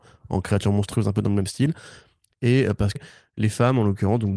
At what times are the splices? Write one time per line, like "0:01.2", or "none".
0:03.0